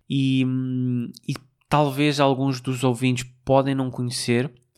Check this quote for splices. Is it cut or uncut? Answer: uncut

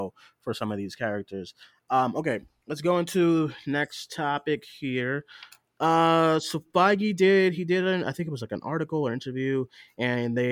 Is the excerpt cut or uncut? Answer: uncut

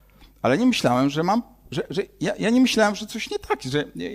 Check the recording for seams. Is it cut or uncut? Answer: uncut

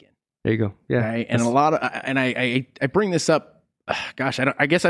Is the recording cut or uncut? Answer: uncut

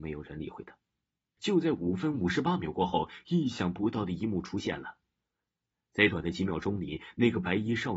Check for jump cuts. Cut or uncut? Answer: cut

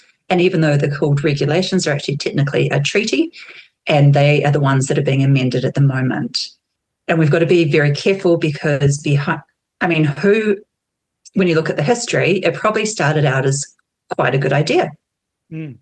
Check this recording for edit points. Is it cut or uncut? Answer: uncut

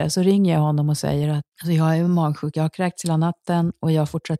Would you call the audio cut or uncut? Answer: cut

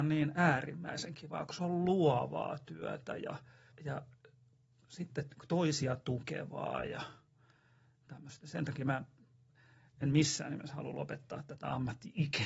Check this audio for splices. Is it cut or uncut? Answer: cut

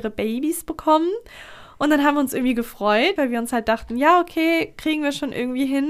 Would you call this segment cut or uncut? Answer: cut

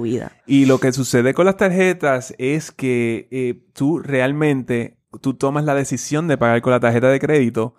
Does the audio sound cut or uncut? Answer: uncut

